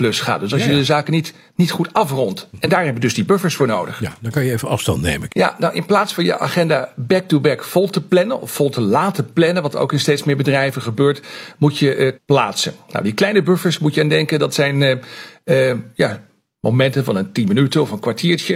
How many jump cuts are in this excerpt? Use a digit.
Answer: 2